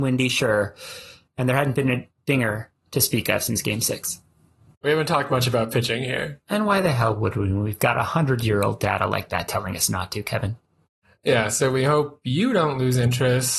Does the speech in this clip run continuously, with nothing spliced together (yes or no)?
yes